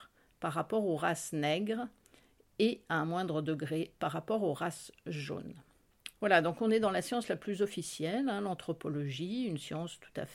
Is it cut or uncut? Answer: cut